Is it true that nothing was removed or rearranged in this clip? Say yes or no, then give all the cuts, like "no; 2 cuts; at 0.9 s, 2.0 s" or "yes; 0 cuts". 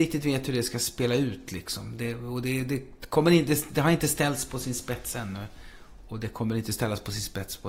yes; 0 cuts